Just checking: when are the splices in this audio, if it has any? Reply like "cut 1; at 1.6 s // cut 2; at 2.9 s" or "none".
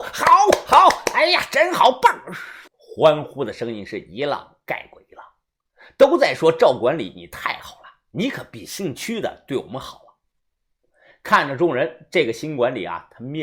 cut 1; at 2.7 s